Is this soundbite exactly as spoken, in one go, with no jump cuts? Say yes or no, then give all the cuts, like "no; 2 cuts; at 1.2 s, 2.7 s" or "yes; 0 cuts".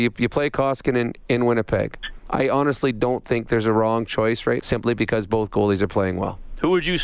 no; 2 cuts; at 2.3 s, 4.6 s